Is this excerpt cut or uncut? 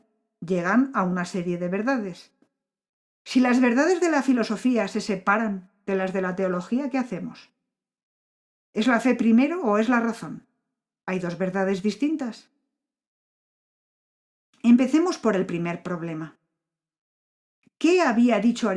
uncut